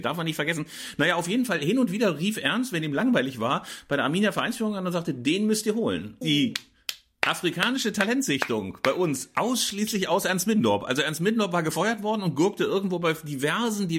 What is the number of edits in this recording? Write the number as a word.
one